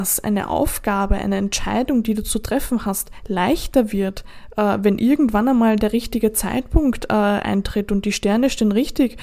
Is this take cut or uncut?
uncut